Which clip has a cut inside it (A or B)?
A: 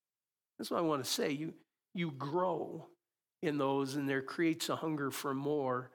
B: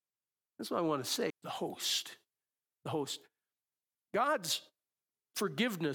B